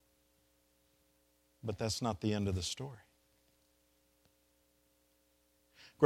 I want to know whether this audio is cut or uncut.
uncut